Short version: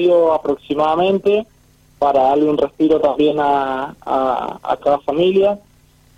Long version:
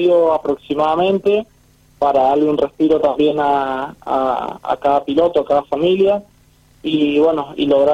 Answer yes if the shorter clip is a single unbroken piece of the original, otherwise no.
no